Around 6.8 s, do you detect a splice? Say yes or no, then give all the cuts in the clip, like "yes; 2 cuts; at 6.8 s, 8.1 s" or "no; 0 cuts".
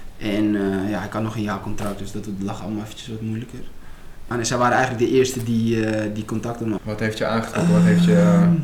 yes; 2 cuts; at 4.3 s, 6.8 s